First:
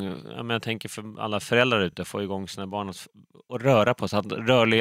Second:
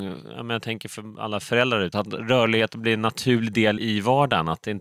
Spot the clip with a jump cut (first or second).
second